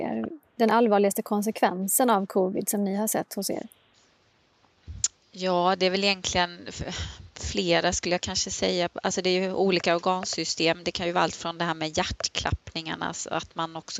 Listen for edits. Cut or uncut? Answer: uncut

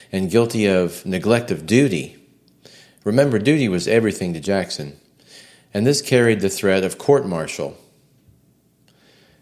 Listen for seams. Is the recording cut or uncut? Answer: uncut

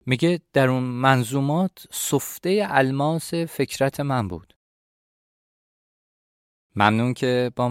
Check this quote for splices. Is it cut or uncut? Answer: uncut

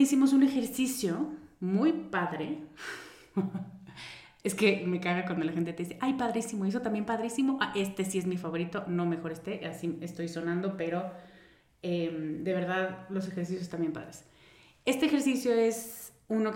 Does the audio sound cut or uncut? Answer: uncut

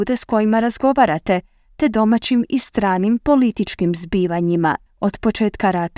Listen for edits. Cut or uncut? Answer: cut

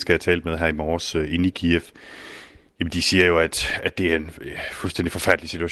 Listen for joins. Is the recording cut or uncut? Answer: uncut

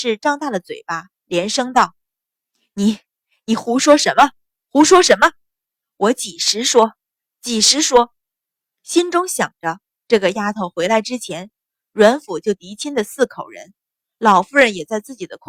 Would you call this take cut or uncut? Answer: uncut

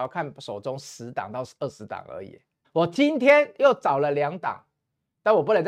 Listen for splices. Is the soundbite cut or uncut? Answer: cut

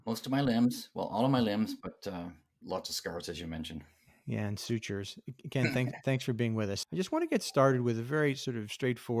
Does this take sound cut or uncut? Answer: uncut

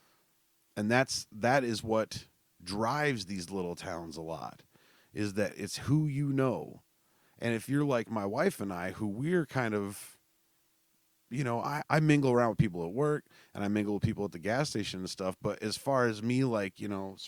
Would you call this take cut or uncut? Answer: cut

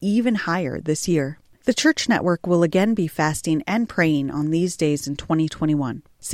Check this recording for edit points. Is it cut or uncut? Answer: cut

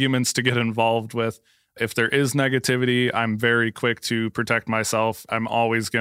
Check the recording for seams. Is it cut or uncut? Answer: cut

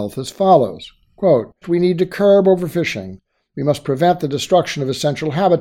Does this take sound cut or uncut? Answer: cut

